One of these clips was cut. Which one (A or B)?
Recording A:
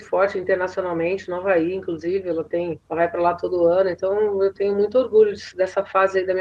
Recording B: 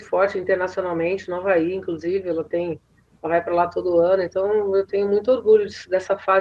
A